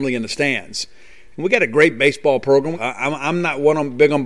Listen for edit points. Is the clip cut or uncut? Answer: cut